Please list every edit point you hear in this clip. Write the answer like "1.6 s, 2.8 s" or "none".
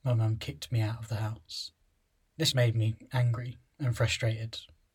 2.5 s